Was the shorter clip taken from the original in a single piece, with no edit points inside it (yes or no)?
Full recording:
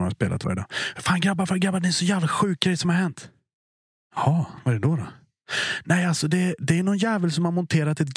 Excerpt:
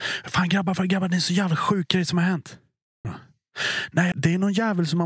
no